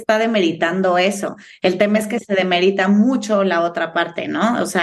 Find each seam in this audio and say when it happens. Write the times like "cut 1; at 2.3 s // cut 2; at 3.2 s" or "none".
none